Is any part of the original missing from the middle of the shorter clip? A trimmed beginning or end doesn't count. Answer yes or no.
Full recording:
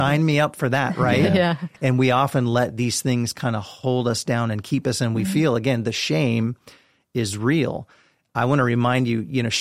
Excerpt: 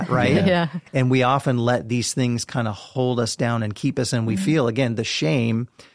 no